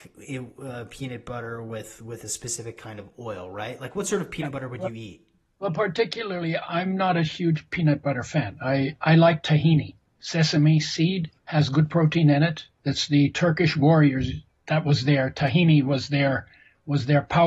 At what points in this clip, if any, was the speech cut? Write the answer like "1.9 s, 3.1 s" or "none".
11.4 s